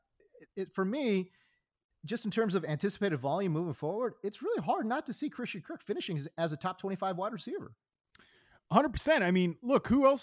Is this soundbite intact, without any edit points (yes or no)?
yes